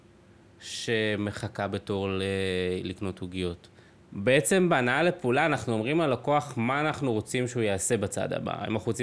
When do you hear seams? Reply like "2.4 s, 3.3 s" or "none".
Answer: 4.0 s